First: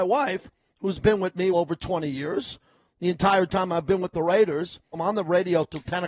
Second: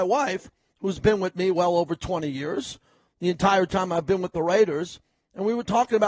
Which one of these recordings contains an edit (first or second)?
first